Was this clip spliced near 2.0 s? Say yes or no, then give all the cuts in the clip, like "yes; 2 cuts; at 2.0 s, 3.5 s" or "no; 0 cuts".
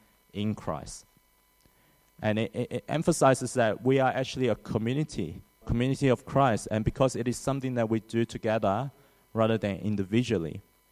no; 1 cut; at 5.6 s